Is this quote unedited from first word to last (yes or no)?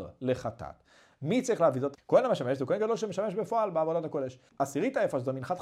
no